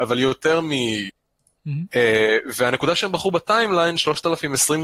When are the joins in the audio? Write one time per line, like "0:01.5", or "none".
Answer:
0:01.5